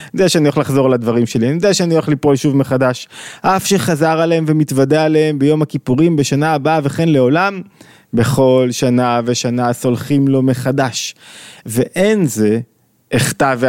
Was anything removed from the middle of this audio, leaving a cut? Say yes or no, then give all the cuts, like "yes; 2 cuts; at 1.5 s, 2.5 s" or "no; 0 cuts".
no; 0 cuts